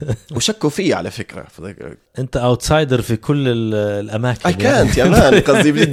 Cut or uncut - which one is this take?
uncut